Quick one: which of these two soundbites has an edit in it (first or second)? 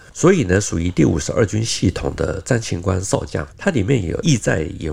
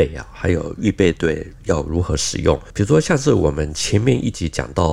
first